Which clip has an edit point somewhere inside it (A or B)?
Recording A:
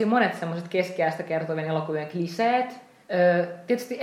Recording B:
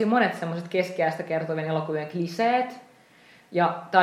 A